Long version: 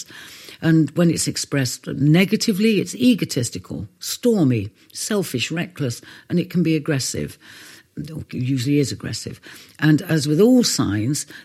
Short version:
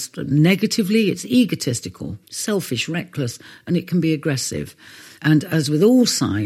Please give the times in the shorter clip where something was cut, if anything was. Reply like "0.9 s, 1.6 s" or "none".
2.2 s, 5.2 s